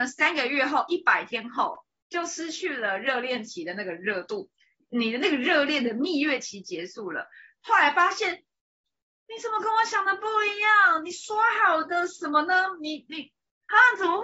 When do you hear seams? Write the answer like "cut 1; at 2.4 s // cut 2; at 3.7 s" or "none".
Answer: none